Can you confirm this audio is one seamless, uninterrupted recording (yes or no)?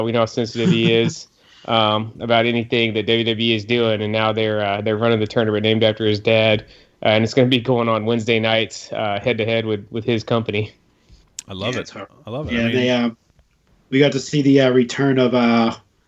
yes